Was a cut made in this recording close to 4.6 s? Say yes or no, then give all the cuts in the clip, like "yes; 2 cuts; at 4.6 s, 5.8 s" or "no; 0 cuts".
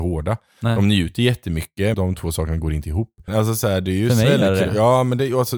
no; 2 cuts; at 1.9 s, 3.3 s